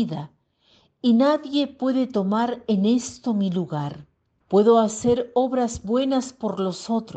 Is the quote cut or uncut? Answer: cut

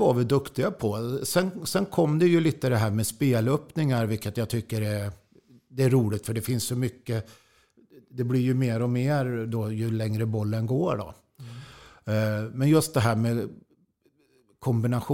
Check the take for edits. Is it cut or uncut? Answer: uncut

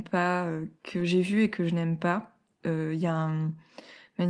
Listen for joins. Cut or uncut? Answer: uncut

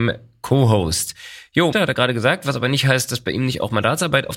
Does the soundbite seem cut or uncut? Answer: cut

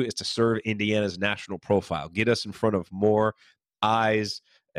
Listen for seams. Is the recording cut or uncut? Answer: uncut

